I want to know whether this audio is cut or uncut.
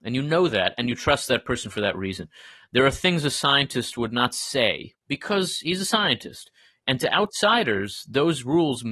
cut